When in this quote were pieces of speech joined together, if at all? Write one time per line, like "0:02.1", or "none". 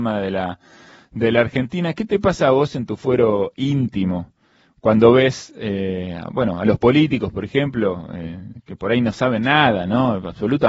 none